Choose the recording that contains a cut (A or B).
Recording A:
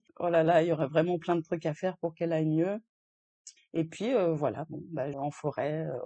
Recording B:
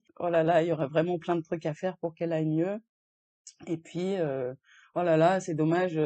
A